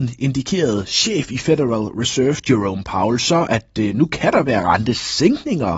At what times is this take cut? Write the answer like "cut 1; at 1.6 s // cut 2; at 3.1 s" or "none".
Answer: none